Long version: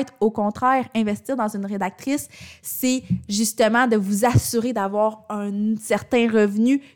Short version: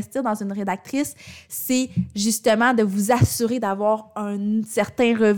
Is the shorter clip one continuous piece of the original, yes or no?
yes